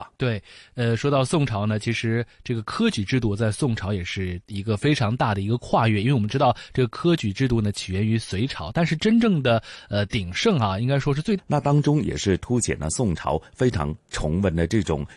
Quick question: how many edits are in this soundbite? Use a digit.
1